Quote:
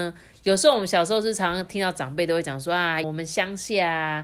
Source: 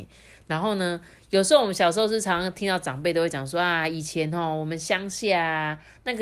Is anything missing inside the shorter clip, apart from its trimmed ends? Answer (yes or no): yes